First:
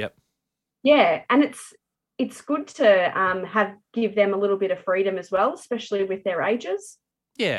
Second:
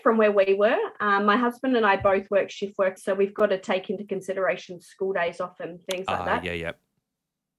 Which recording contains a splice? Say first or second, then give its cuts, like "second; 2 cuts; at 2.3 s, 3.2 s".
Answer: second; 1 cut; at 3.0 s